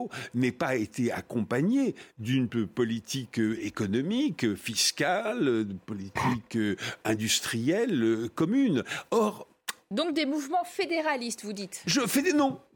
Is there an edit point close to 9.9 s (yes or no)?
no